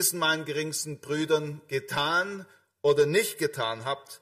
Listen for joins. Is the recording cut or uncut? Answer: uncut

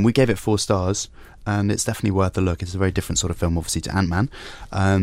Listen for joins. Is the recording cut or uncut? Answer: uncut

